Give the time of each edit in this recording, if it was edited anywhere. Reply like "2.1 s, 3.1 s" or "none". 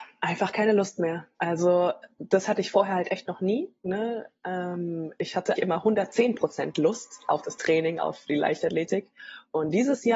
5.6 s